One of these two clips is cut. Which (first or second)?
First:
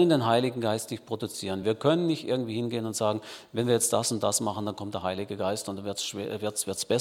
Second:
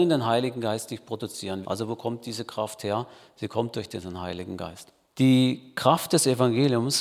second